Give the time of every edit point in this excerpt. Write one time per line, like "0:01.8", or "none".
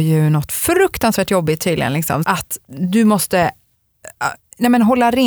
0:02.2